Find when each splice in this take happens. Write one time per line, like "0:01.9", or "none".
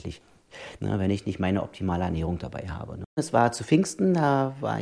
0:03.0

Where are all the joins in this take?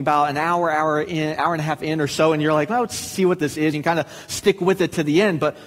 none

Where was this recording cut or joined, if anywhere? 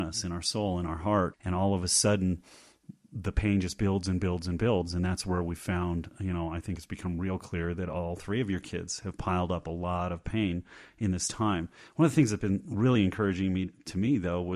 0:01.3

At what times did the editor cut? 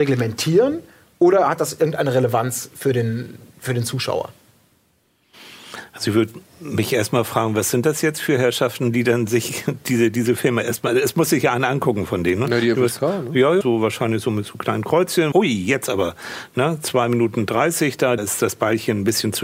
0:13.6
0:15.3
0:18.2

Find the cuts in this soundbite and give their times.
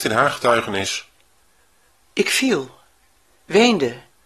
none

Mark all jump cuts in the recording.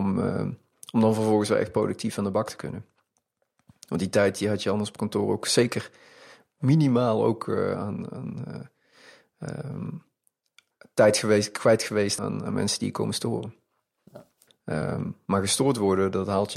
0:12.2
0:14.5

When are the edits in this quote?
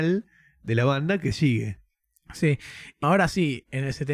0:03.0

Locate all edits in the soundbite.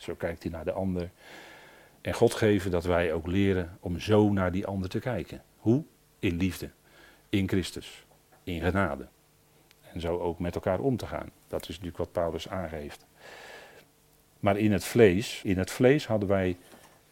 0:11.3
0:15.4

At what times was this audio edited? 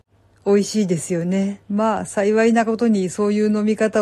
0:01.6

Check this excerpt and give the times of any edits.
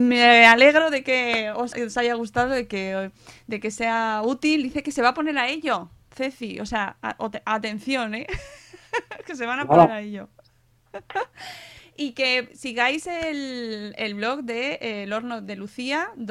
0:01.7

